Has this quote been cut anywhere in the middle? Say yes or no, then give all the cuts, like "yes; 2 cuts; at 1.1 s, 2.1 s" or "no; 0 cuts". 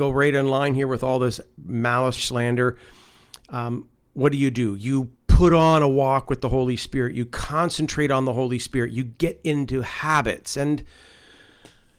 yes; 1 cut; at 2.2 s